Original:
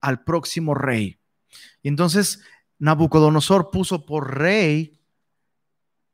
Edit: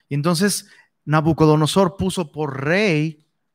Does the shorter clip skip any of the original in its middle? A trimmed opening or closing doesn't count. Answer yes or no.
no